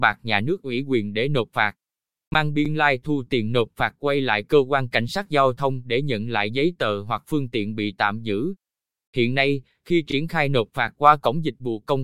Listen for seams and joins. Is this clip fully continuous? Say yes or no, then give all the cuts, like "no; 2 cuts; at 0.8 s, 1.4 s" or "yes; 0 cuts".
yes; 0 cuts